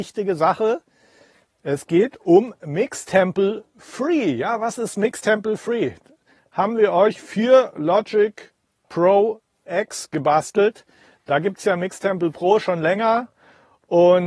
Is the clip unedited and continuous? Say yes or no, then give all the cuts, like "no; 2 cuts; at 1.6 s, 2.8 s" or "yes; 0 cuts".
no; 1 cut; at 6.4 s